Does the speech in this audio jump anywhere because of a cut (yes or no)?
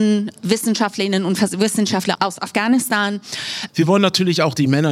yes